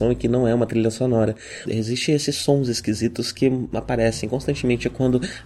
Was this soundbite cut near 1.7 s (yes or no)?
yes